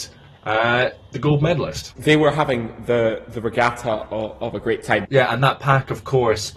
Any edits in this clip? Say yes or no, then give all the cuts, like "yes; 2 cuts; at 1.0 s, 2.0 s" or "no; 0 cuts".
yes; 2 cuts; at 2.0 s, 5.0 s